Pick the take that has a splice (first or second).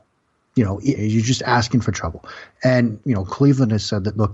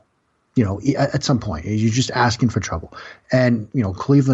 first